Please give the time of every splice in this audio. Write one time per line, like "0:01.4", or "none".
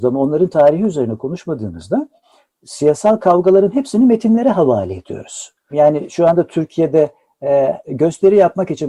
0:05.7